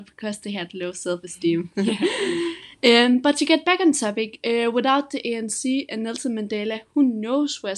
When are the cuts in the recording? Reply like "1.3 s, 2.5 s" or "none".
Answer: none